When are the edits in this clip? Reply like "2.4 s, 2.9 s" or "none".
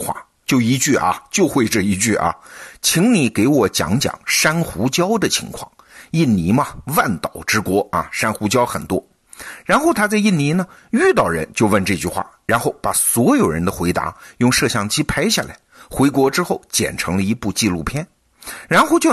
none